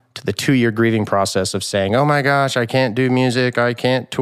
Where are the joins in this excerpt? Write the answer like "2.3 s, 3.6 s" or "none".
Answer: none